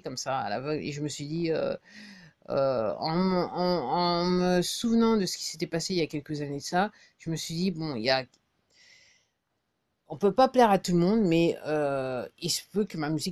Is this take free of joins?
yes; 0 cuts

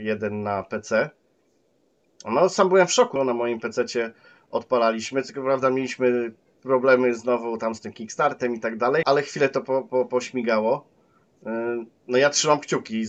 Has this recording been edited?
yes; 2 cuts; at 3.2 s, 9.0 s

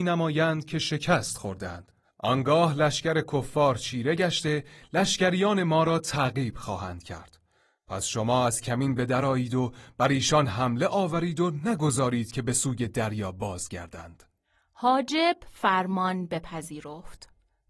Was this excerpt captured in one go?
yes; 0 cuts

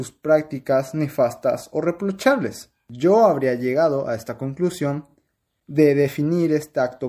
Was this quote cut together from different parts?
no; 0 cuts

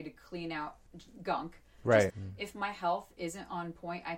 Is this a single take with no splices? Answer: no; 1 cut; at 2.1 s

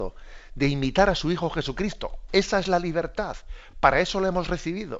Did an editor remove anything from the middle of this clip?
no; 0 cuts

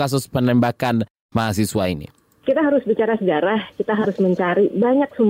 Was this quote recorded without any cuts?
yes; 0 cuts

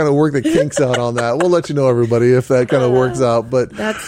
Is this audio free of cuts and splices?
yes; 0 cuts

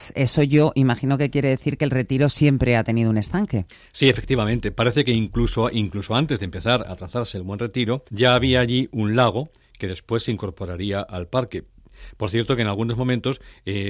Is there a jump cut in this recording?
yes; 1 cut; at 8.1 s

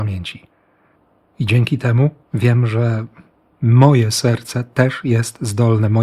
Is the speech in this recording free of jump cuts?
no; 1 cut; at 2.2 s

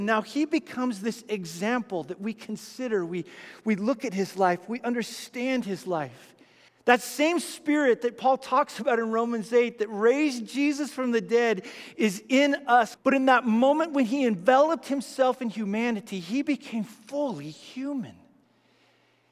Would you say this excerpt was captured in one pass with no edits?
no; 2 cuts; at 6.7 s, 12.9 s

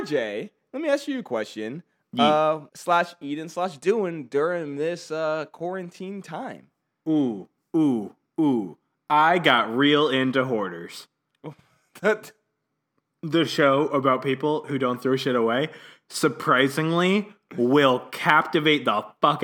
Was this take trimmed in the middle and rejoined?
yes; 1 cut; at 2.7 s

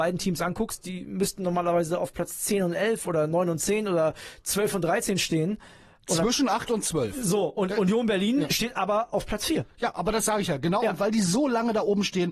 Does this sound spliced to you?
no; 0 cuts

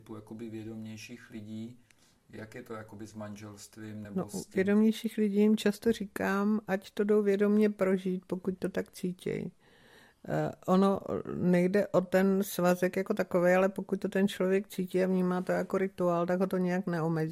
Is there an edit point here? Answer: no; 0 cuts

